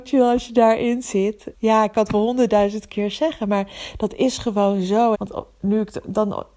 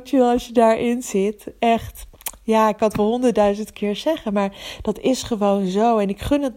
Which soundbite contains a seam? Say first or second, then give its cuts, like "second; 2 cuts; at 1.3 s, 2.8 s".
first; 2 cuts; at 1.5 s, 5.1 s